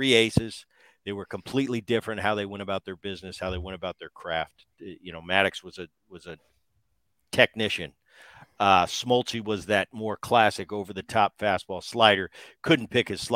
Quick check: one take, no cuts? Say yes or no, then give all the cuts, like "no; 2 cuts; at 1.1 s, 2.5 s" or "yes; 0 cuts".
yes; 0 cuts